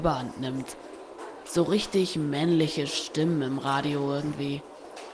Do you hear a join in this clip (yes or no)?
yes